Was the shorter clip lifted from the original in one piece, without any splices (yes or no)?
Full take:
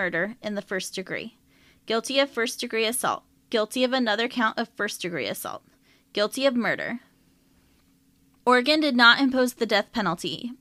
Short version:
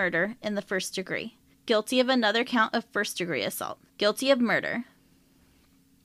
no